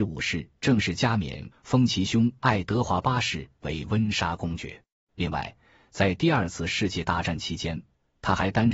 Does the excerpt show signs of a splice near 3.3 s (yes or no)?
no